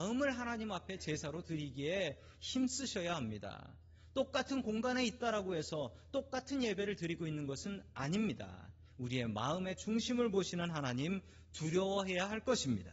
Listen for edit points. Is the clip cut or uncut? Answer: uncut